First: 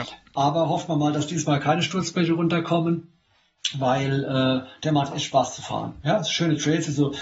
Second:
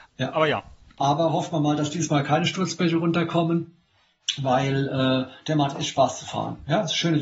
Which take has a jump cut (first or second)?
second